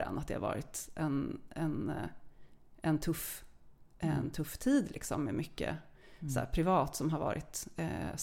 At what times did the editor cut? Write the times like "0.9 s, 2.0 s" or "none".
none